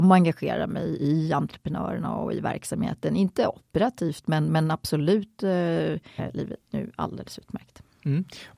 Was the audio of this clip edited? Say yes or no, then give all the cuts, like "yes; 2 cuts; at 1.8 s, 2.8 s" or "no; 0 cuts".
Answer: yes; 1 cut; at 6.2 s